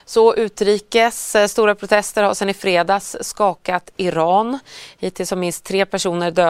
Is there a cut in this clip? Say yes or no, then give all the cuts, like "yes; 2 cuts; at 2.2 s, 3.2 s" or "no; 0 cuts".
no; 0 cuts